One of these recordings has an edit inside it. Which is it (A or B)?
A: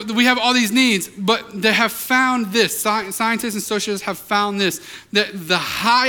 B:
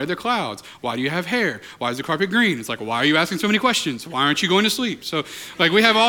B